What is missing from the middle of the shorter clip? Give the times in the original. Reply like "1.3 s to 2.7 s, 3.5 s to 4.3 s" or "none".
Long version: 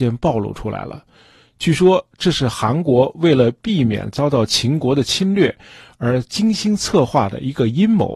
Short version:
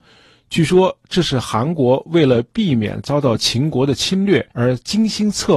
5.6 s to 6.0 s